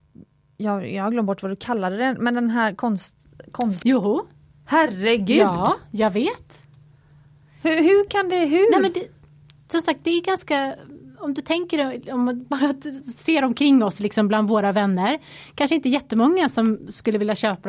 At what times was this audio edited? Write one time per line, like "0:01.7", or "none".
0:03.8